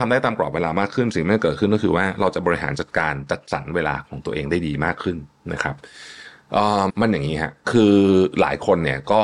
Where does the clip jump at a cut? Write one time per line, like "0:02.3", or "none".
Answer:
0:06.9